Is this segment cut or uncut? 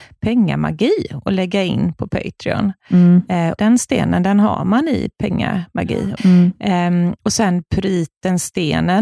cut